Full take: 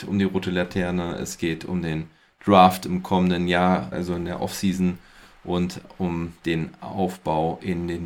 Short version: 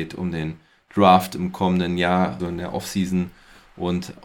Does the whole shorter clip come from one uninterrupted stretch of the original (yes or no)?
no